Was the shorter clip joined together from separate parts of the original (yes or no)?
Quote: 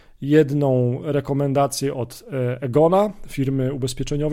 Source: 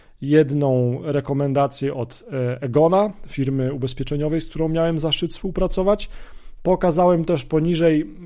no